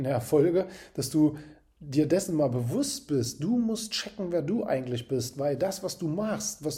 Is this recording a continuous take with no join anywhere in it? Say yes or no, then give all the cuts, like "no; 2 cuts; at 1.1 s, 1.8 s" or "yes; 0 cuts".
yes; 0 cuts